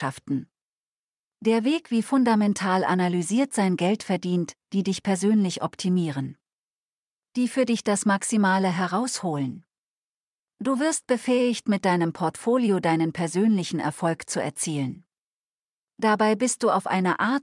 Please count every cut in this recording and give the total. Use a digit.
1